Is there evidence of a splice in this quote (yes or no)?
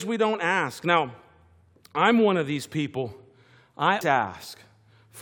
yes